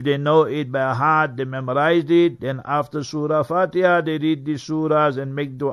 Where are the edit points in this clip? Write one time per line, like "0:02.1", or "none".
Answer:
none